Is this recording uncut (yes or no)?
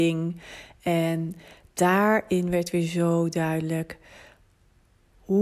yes